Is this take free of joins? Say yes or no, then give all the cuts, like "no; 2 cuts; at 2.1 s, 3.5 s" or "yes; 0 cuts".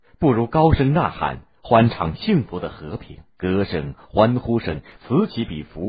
no; 1 cut; at 3.3 s